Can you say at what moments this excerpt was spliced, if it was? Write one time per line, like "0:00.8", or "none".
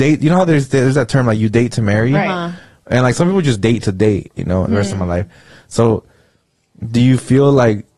0:04.7